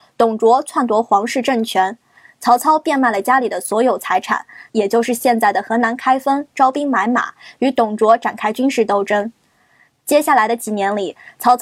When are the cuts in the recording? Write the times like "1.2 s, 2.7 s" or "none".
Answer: 4.7 s, 9.9 s